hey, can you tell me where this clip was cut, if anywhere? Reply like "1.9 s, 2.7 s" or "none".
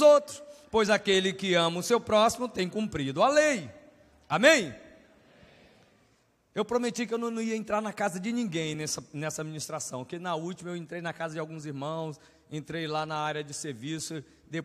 none